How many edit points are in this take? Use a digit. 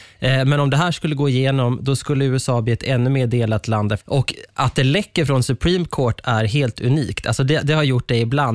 1